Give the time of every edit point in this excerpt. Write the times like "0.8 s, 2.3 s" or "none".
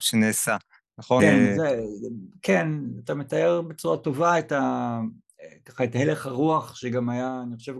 1.2 s